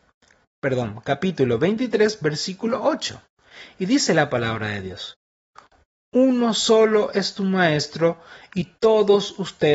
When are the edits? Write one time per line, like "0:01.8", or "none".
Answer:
none